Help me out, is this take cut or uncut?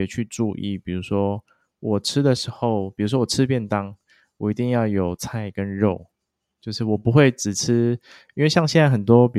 uncut